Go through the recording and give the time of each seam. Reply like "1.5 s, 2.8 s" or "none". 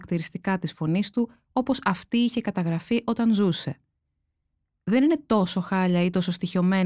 none